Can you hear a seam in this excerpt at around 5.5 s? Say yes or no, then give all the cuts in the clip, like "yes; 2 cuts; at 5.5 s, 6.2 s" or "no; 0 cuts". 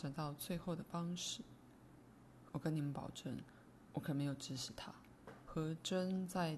yes; 2 cuts; at 2.5 s, 5.5 s